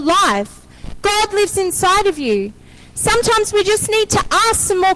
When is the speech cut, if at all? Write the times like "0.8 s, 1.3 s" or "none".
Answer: none